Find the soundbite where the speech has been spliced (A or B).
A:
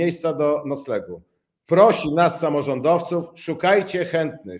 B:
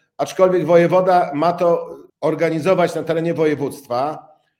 B